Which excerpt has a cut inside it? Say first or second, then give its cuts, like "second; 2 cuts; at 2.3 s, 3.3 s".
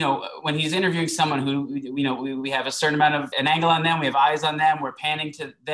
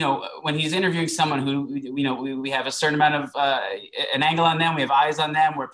first; 1 cut; at 3.3 s